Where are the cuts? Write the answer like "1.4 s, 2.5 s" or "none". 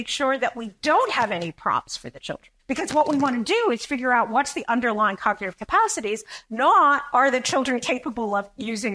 2.6 s